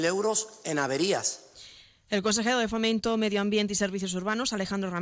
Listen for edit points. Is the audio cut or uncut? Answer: uncut